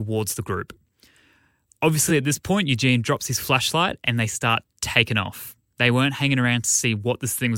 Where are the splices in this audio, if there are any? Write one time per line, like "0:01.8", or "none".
none